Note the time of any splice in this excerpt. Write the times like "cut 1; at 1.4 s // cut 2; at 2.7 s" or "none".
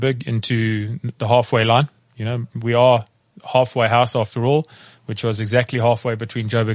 none